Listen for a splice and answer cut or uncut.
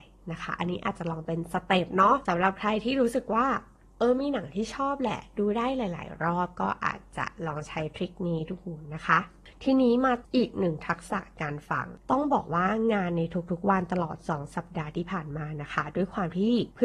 cut